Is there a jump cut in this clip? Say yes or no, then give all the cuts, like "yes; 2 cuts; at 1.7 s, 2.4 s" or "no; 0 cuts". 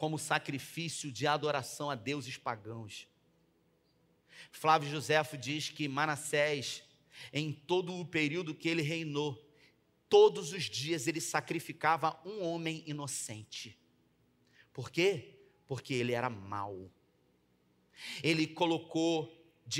no; 0 cuts